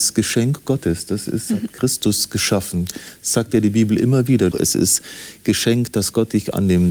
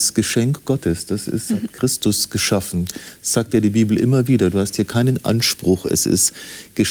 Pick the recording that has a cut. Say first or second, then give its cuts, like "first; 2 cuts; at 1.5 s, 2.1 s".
first; 1 cut; at 4.5 s